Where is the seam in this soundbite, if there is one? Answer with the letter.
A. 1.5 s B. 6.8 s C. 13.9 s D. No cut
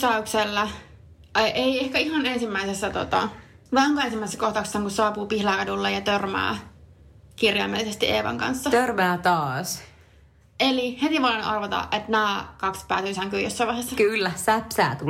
D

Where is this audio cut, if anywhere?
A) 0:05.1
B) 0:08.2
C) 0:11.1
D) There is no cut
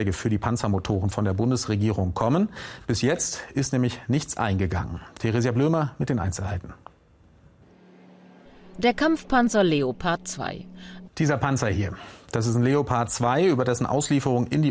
C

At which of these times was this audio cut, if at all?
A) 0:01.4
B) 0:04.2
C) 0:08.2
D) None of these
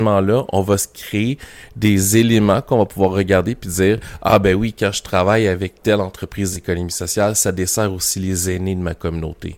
D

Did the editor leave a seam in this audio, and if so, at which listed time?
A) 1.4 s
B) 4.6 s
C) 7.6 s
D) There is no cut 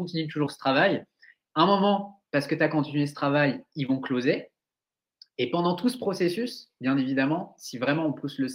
D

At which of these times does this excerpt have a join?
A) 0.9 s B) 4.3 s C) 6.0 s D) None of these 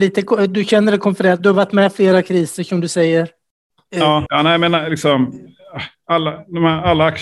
B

